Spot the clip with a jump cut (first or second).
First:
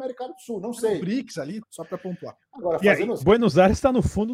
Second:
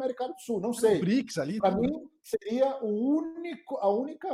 first